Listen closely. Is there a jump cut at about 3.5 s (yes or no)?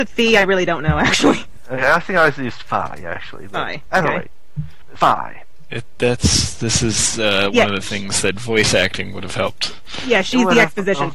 no